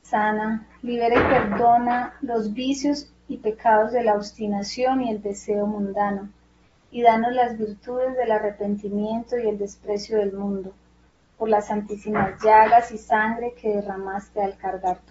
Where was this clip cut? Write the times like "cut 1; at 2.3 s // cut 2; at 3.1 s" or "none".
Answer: none